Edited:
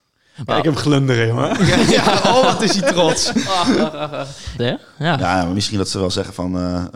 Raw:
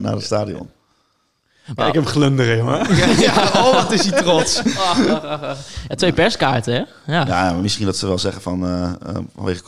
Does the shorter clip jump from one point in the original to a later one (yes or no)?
yes